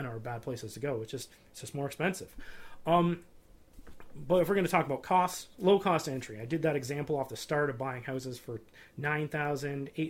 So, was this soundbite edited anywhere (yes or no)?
no